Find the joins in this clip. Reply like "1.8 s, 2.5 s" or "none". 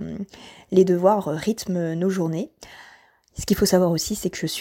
none